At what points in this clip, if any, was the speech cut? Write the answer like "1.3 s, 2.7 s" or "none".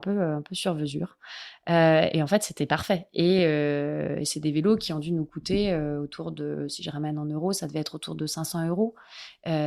none

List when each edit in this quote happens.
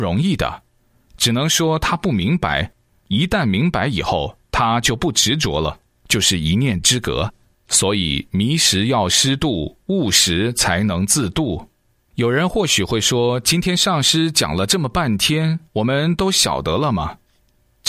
12.1 s, 15.7 s

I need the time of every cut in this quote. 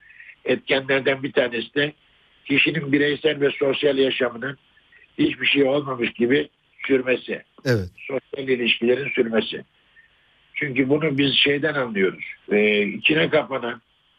12.4 s

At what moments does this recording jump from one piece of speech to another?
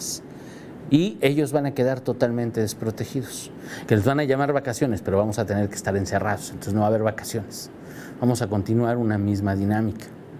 3.9 s

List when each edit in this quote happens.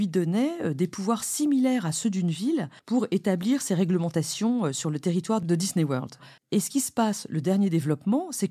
2.8 s, 6.4 s

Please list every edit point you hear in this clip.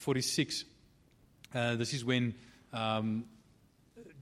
none

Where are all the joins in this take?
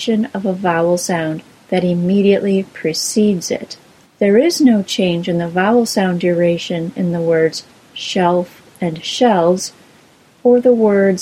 4.0 s

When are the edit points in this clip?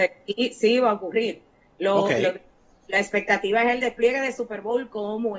none

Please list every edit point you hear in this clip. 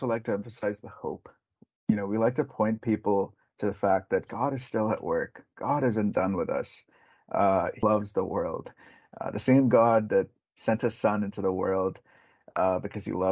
7.8 s

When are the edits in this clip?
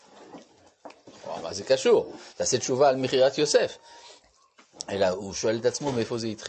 none

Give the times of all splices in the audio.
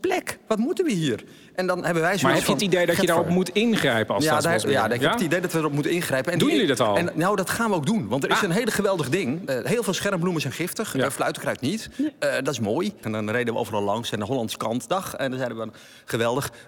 13.0 s

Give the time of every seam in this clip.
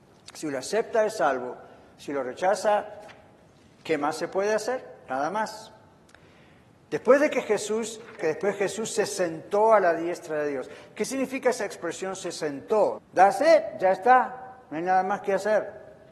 8.2 s, 13.0 s

